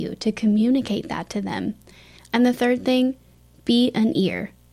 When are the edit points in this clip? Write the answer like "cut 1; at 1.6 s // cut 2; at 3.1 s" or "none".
cut 1; at 2.2 s

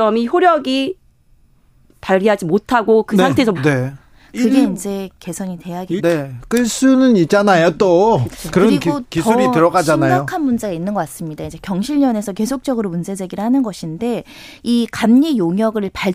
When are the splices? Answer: cut 1; at 3.5 s // cut 2; at 6.0 s

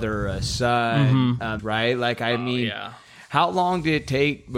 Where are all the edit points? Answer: cut 1; at 1.6 s

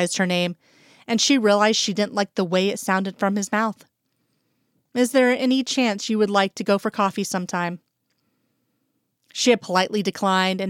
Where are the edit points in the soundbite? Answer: none

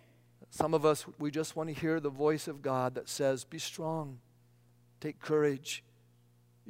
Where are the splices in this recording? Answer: none

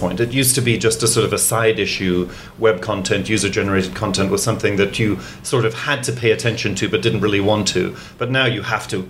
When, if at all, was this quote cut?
none

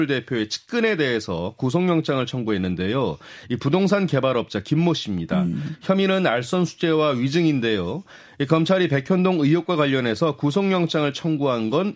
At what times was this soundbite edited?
none

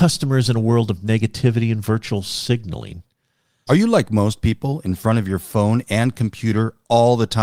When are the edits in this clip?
cut 1; at 3.7 s

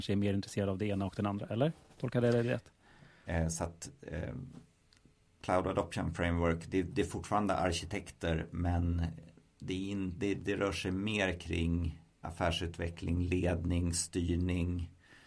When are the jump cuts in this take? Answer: cut 1; at 3.3 s // cut 2; at 12.2 s

